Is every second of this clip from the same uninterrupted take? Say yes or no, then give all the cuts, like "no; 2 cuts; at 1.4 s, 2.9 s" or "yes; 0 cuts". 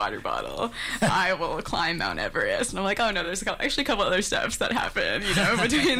yes; 0 cuts